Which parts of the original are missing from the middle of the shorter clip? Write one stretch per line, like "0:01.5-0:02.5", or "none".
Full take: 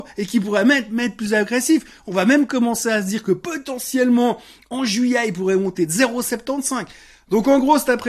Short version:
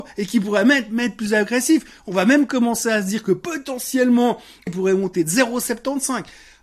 0:04.7-0:05.3